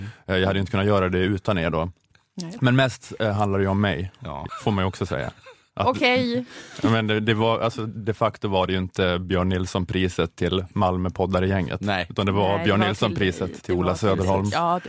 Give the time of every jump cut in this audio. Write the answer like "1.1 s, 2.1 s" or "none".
none